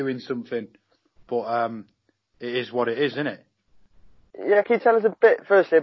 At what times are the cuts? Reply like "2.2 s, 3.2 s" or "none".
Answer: none